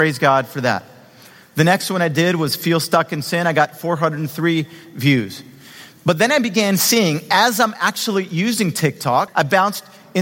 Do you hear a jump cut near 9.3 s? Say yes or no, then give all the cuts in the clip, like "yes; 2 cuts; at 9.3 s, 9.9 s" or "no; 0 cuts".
yes; 1 cut; at 9.3 s